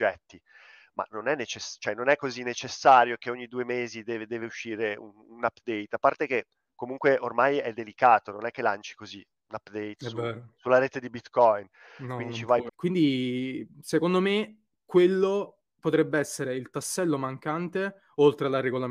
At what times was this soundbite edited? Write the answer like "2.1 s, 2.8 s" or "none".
12.7 s